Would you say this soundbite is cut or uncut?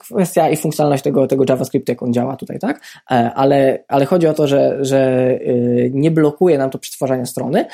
uncut